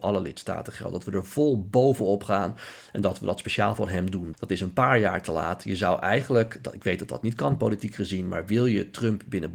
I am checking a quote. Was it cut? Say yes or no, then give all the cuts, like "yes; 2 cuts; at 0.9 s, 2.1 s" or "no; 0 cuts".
yes; 1 cut; at 4.3 s